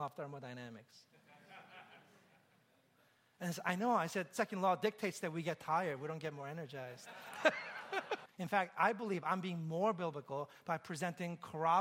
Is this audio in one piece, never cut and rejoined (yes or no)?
no